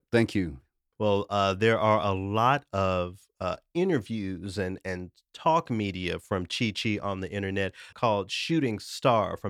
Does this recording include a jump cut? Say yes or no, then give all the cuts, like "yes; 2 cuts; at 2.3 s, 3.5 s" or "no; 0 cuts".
yes; 2 cuts; at 0.9 s, 7.9 s